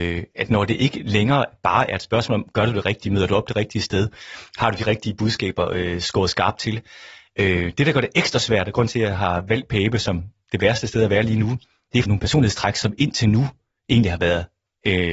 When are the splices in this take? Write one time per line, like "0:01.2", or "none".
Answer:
0:12.1